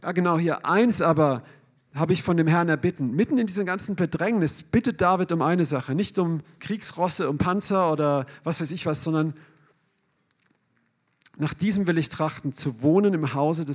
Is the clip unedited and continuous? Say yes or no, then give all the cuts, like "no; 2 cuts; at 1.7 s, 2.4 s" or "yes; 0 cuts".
no; 1 cut; at 6.6 s